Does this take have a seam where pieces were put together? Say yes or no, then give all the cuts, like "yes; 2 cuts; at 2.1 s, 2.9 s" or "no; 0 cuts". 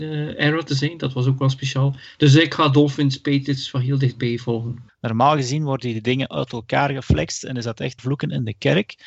yes; 2 cuts; at 4.9 s, 8.0 s